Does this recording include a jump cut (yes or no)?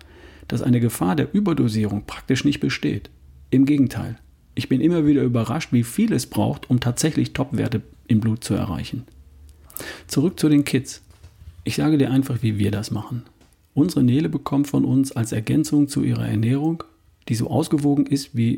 no